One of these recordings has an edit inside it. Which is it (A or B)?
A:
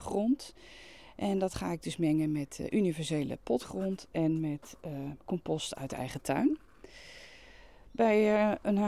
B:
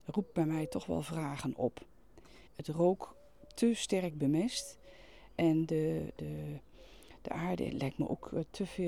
B